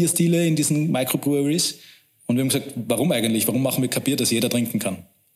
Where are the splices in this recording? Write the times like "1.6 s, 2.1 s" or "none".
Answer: none